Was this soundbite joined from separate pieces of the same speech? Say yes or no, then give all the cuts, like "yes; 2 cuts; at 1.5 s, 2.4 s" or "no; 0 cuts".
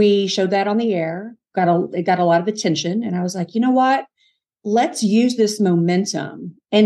no; 0 cuts